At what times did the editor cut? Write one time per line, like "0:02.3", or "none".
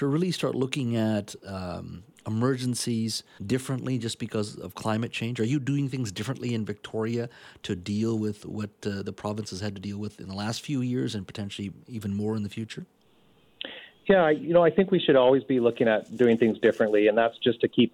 0:03.4